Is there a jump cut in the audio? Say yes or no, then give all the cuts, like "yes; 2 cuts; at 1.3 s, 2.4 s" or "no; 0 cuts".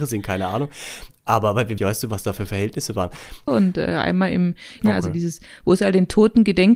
yes; 3 cuts; at 1.8 s, 3.5 s, 4.8 s